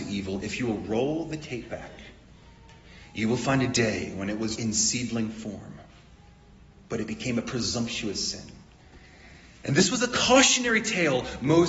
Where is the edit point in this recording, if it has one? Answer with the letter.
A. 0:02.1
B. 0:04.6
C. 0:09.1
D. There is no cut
B